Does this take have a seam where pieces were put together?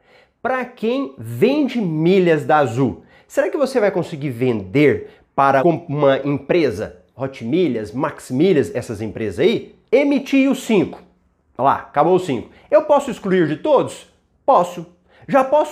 yes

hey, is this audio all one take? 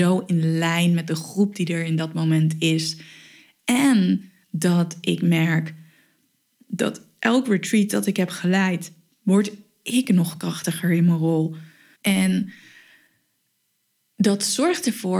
no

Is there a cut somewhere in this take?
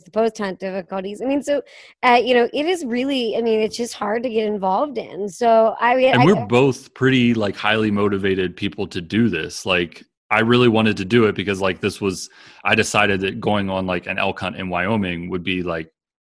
no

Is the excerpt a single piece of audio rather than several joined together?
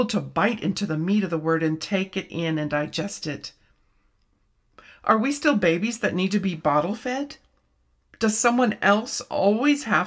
yes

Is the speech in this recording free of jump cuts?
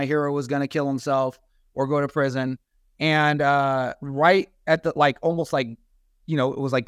yes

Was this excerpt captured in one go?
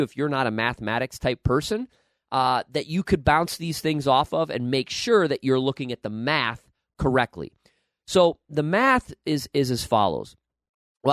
yes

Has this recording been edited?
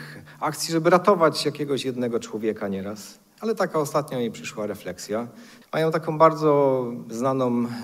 yes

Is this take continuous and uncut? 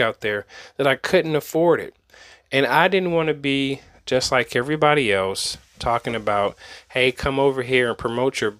yes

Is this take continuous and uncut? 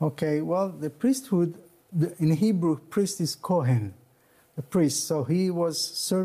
yes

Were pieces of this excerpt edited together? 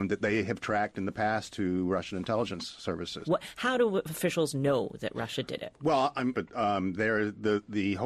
yes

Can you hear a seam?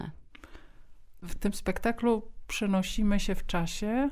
no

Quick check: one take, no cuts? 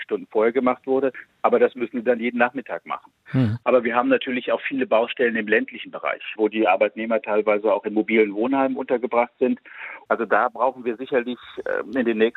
no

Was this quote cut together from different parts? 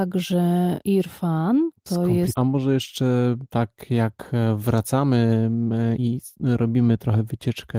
yes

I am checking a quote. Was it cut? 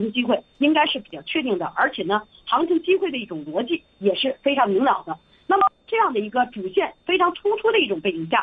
no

